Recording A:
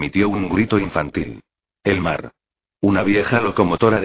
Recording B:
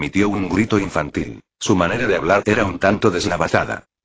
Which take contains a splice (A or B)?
B